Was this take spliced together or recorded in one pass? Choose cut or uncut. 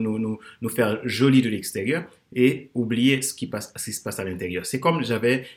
uncut